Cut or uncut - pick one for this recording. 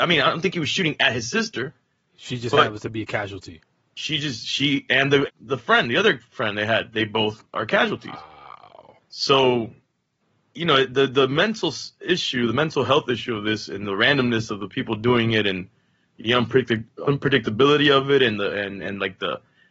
cut